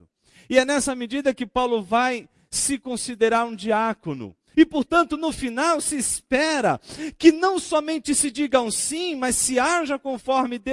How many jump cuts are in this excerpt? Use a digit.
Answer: 1